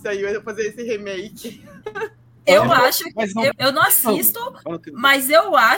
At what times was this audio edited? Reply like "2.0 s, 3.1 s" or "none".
3.5 s